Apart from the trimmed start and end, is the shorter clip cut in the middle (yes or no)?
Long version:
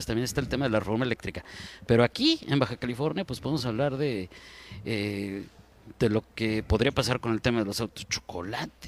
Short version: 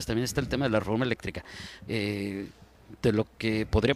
yes